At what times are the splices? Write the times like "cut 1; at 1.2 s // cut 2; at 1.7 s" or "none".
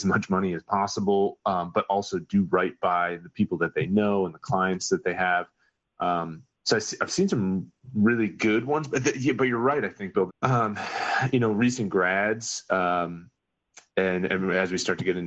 cut 1; at 10.3 s